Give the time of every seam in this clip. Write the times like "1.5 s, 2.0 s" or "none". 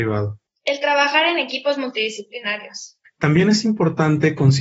3.0 s